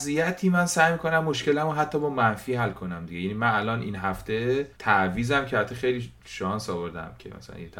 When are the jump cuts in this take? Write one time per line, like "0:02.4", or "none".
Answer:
0:04.7